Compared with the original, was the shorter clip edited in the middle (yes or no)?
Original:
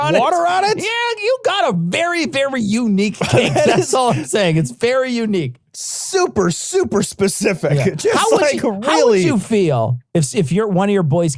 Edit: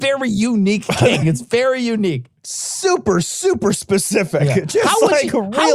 yes